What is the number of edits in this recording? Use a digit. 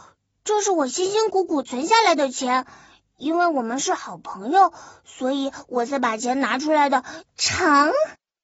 1